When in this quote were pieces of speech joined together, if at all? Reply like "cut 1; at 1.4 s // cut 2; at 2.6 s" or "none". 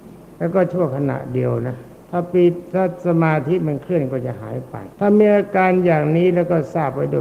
cut 1; at 2.0 s // cut 2; at 4.9 s